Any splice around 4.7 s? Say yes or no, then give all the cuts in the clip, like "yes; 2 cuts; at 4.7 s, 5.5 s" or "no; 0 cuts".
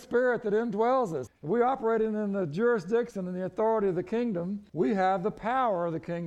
yes; 2 cuts; at 1.3 s, 4.7 s